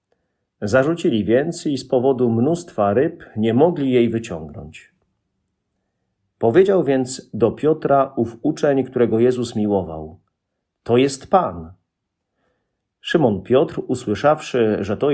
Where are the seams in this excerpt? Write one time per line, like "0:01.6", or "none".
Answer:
none